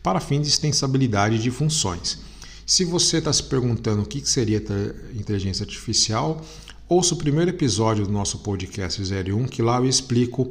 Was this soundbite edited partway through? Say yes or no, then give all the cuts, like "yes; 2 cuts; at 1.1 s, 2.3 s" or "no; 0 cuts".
no; 0 cuts